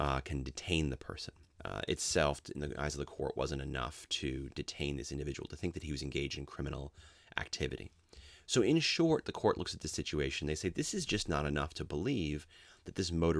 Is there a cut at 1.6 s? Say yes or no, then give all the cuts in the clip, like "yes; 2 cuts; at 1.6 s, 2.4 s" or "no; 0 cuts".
yes; 1 cut; at 1.6 s